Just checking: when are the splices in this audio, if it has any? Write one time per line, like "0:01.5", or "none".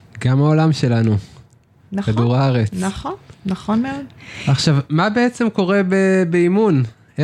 none

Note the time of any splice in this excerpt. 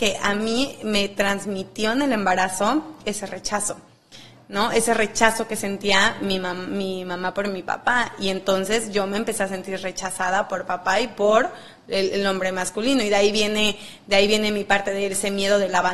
none

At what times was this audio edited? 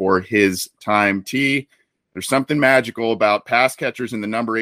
none

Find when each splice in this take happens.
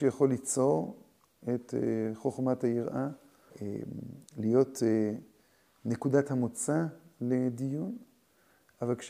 0:03.5

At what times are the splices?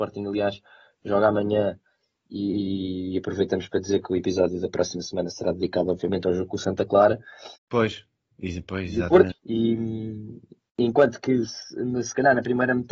0:07.6
0:09.3

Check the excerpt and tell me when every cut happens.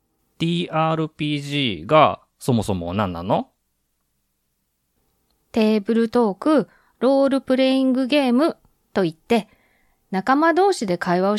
none

